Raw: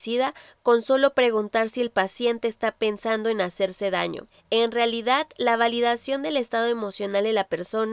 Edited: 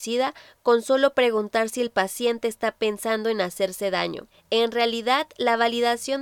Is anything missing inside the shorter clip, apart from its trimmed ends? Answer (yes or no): no